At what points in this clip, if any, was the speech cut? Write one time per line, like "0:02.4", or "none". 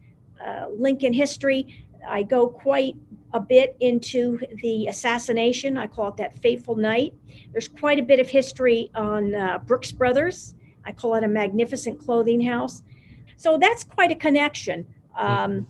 0:13.3